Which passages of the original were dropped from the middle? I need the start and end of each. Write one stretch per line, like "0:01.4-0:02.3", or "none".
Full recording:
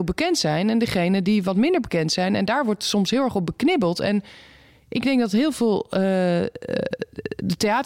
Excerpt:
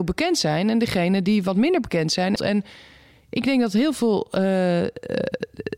0:02.4-0:03.9